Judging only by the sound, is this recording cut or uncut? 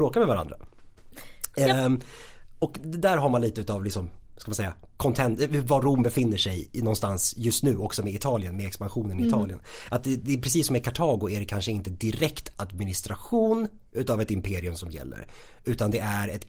uncut